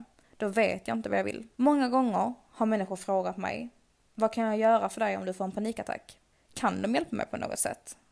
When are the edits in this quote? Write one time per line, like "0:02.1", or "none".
0:01.6
0:06.3